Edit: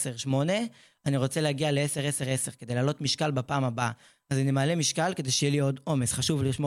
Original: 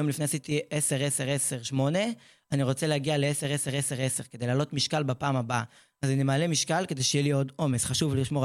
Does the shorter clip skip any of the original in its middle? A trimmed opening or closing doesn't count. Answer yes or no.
yes